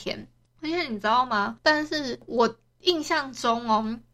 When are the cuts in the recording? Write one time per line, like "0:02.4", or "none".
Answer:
0:01.6